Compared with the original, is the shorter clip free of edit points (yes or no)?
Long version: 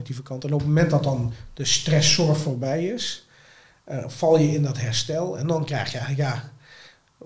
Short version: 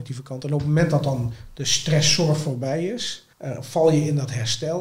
no